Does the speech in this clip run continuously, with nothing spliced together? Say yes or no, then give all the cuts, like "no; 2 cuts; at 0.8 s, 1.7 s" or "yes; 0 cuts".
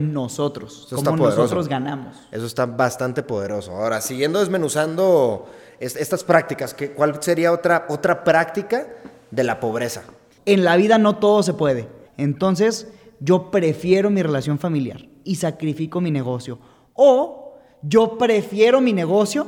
no; 2 cuts; at 10.4 s, 12.1 s